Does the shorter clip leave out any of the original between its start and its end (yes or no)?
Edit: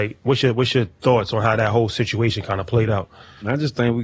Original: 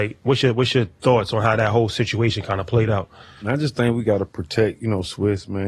no